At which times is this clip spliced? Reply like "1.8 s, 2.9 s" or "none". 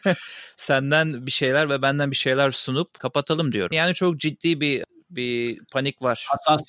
3.7 s